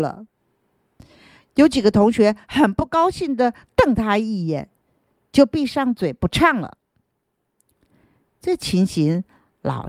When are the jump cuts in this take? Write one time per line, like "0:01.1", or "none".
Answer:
none